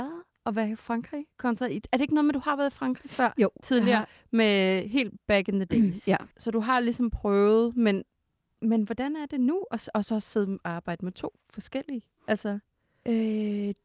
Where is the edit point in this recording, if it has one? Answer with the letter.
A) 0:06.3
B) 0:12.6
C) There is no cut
A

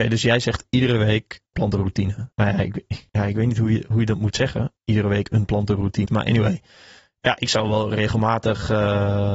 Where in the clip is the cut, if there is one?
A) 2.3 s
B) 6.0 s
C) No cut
B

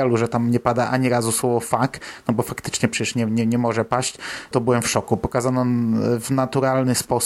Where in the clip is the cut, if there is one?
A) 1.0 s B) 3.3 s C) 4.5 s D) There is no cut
C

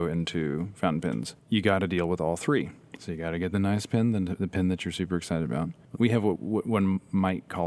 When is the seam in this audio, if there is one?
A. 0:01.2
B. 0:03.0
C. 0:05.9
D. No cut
C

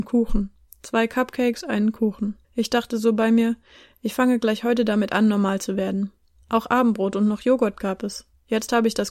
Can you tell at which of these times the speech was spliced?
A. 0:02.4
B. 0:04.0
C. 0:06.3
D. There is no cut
A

